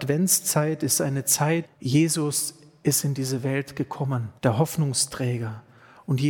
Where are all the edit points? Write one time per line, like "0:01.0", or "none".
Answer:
0:01.6
0:04.4